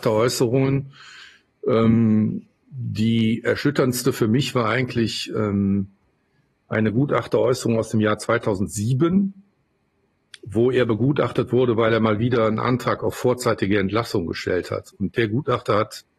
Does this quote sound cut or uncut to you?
uncut